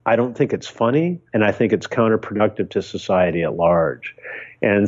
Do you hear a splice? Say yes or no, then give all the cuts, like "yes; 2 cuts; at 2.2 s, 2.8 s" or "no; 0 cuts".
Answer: yes; 1 cut; at 1.3 s